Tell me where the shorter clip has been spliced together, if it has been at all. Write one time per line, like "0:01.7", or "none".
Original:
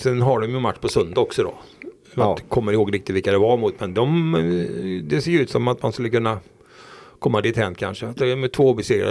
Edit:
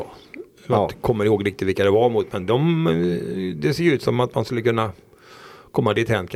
none